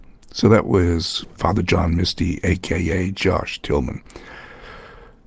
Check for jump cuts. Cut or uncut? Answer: cut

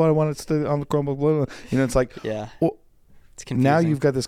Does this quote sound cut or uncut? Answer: uncut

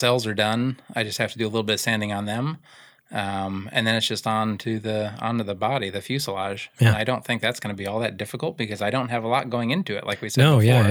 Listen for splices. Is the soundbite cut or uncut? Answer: uncut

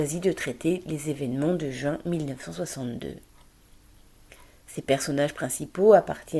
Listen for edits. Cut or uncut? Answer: uncut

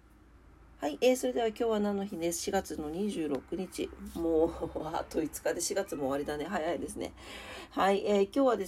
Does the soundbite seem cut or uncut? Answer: uncut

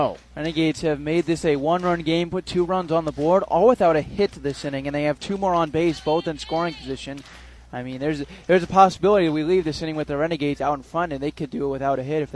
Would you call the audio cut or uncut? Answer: uncut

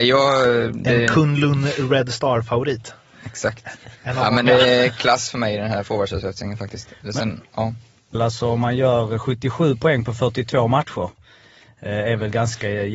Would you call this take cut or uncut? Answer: cut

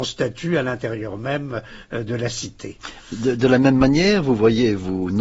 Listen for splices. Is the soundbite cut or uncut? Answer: uncut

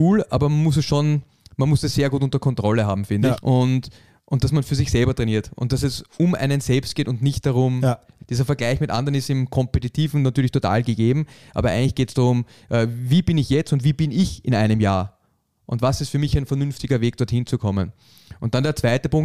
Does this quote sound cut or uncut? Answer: cut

